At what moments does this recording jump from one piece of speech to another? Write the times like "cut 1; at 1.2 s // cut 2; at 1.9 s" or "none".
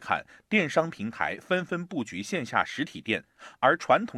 none